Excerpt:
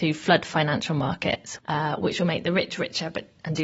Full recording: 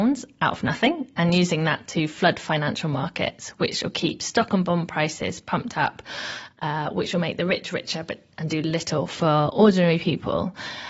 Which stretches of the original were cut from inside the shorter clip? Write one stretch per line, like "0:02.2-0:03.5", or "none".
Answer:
0:03.5-0:06.5